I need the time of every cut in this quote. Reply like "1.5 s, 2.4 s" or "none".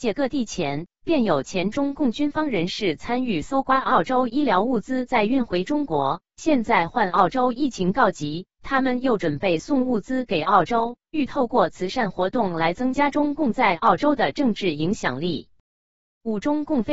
none